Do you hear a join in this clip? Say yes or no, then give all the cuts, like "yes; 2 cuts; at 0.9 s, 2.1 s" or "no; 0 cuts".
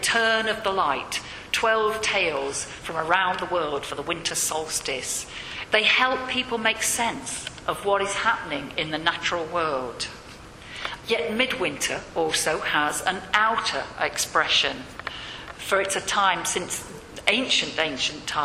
yes; 2 cuts; at 5.7 s, 11.0 s